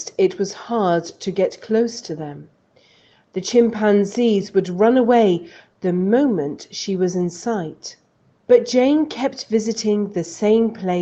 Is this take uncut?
yes; 0 cuts

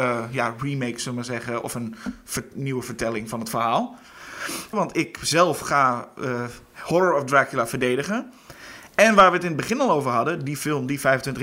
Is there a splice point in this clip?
yes; 1 cut; at 4.7 s

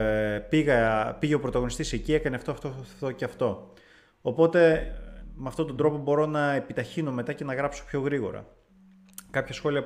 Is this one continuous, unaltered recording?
yes; 0 cuts

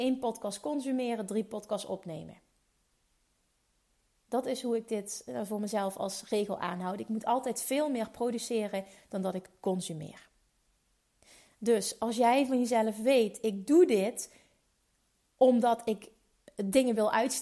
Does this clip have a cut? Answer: no; 0 cuts

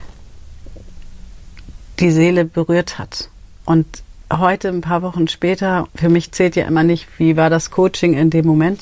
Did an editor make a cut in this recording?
yes; 1 cut; at 5.9 s

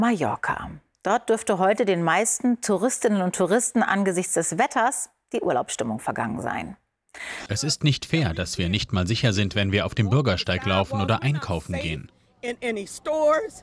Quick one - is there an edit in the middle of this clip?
yes; 1 cut; at 7.5 s

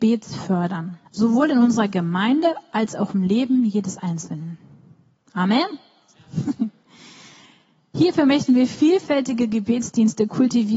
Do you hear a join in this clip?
yes; 1 cut; at 1.1 s

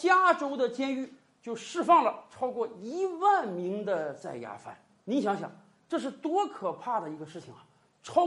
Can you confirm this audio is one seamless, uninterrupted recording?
yes; 0 cuts

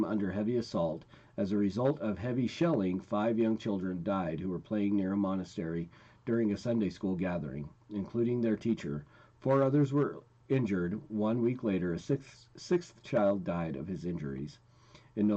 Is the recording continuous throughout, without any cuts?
yes; 0 cuts

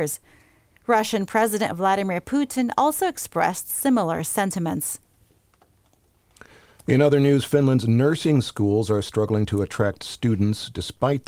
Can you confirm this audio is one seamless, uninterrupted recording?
yes; 0 cuts

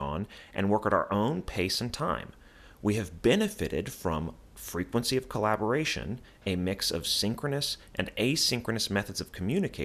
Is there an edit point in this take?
no; 0 cuts

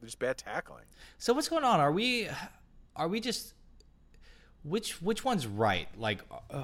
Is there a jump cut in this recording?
no; 0 cuts

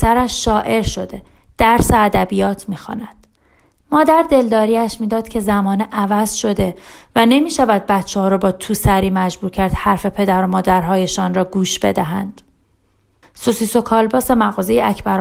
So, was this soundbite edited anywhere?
yes; 2 cuts; at 3.8 s, 13.2 s

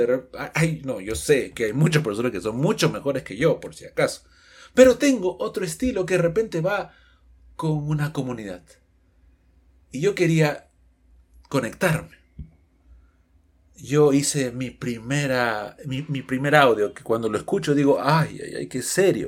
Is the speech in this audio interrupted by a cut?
no; 0 cuts

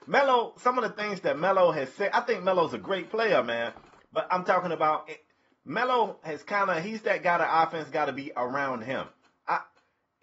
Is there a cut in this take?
no; 0 cuts

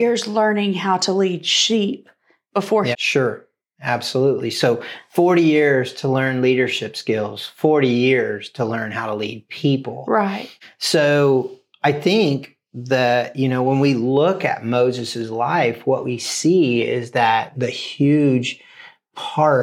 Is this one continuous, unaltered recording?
no; 2 cuts; at 2.9 s, 17.5 s

